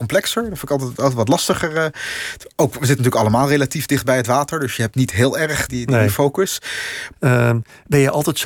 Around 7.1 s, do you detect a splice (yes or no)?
yes